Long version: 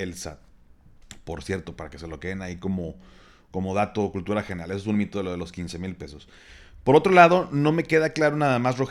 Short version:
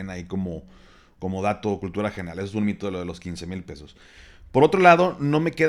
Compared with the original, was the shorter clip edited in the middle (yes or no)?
no